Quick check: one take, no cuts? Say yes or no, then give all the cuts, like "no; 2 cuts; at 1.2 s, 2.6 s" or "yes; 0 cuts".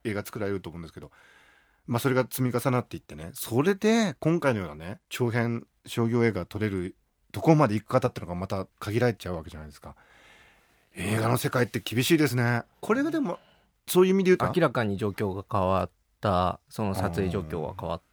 no; 2 cuts; at 12.8 s, 14.4 s